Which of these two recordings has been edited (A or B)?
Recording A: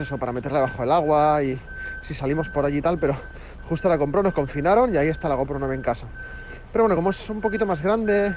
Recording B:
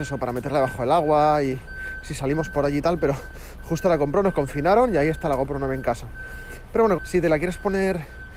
B